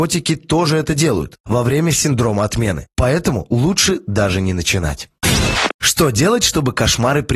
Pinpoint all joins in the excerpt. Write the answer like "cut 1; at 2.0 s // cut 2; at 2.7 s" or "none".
none